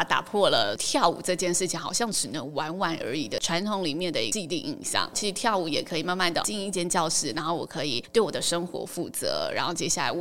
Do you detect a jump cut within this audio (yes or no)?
no